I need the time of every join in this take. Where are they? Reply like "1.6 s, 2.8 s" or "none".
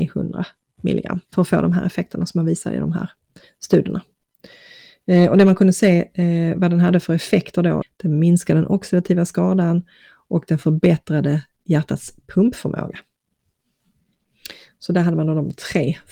1.2 s, 7.8 s